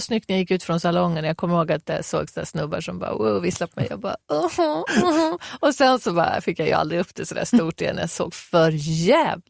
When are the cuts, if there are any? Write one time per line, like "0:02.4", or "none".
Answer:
none